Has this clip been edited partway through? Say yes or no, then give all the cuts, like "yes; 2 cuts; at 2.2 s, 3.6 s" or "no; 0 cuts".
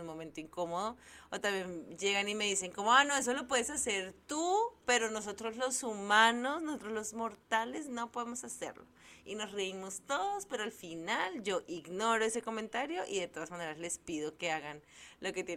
no; 0 cuts